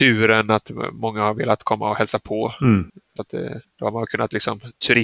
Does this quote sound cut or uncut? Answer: cut